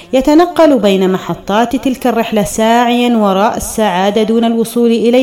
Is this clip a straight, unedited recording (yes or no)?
yes